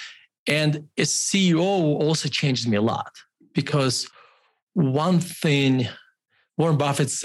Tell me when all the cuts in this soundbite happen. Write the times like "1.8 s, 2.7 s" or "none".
none